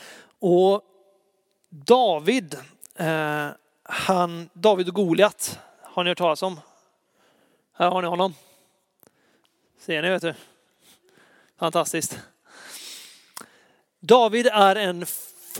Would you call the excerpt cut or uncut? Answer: uncut